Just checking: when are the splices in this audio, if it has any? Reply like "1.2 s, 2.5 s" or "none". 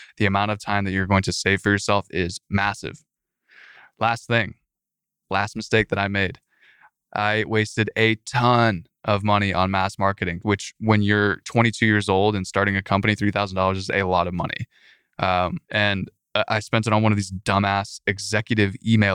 10.4 s, 15.6 s